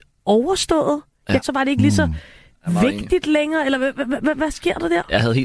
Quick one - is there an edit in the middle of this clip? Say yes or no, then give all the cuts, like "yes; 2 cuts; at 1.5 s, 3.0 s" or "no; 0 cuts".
yes; 1 cut; at 1.4 s